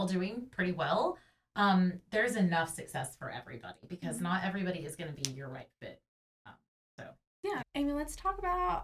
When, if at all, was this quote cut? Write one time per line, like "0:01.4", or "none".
0:07.6